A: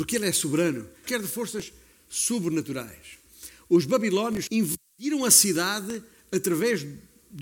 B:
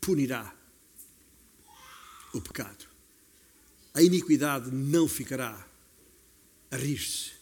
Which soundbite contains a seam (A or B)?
A